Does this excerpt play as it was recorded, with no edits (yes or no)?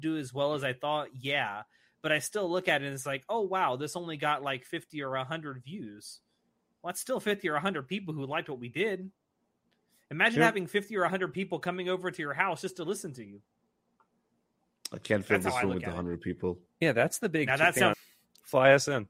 no